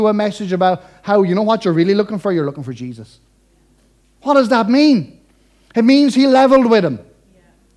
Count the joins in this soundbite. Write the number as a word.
one